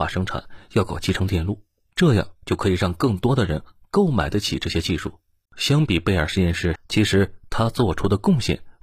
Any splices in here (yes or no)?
yes